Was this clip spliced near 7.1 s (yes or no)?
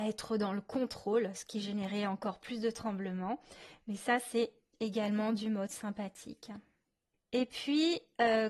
yes